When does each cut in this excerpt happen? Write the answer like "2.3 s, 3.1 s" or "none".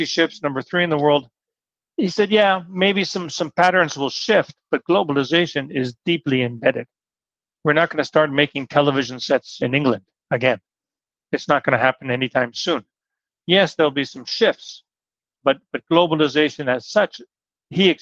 13.3 s